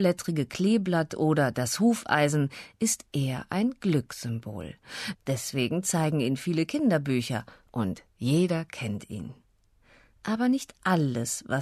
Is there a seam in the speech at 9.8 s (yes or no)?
no